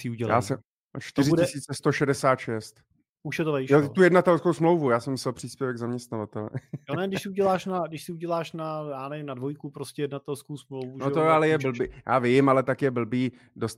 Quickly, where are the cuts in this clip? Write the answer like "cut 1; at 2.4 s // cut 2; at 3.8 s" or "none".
none